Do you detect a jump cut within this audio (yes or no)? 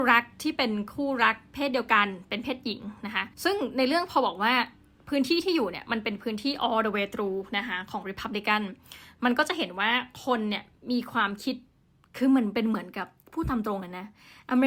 yes